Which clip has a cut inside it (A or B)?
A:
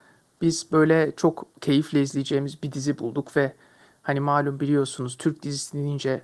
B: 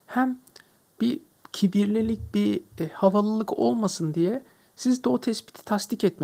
A